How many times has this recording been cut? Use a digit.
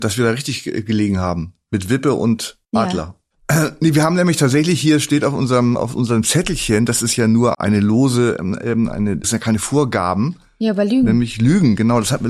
3